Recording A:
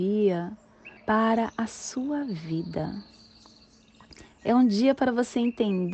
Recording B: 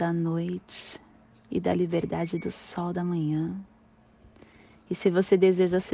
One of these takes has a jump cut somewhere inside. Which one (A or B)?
A